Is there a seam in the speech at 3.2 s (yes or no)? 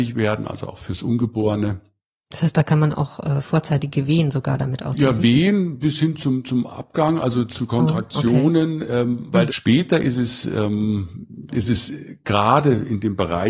no